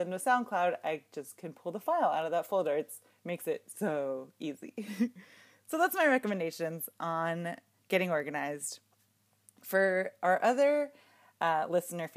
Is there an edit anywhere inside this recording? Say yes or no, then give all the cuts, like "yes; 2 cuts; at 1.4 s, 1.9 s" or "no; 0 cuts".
no; 0 cuts